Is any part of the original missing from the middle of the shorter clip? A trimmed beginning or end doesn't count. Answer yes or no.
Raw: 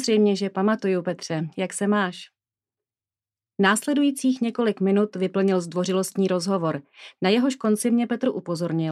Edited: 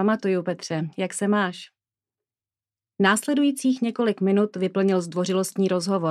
no